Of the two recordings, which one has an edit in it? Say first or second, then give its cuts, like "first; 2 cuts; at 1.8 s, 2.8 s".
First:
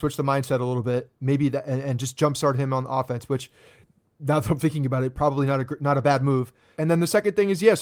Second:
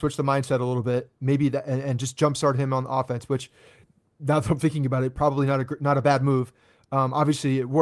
first; 1 cut; at 6.7 s